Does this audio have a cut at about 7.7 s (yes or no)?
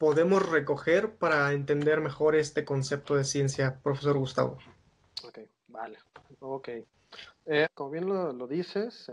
yes